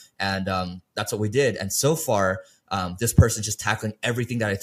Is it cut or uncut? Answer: uncut